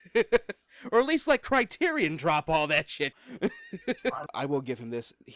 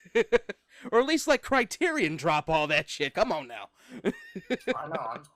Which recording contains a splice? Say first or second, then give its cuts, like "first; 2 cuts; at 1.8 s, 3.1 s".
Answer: first; 2 cuts; at 3.1 s, 4.3 s